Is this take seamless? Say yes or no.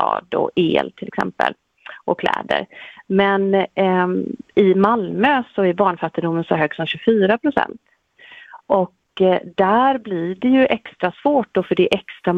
yes